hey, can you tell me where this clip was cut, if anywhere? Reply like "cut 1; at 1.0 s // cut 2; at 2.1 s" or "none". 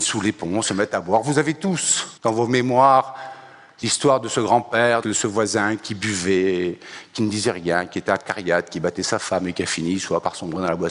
cut 1; at 2.2 s // cut 2; at 5.0 s